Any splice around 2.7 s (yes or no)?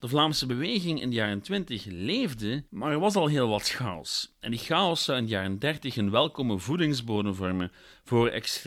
yes